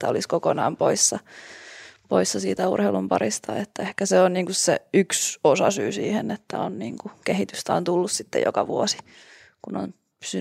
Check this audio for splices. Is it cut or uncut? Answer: uncut